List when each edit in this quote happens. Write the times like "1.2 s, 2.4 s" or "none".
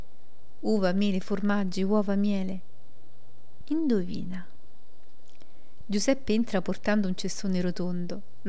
3.6 s, 5.8 s